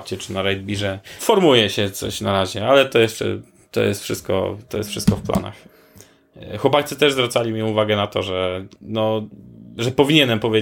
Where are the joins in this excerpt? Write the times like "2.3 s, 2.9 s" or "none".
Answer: 1.2 s